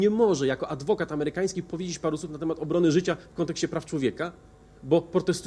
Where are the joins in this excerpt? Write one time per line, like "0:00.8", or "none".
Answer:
none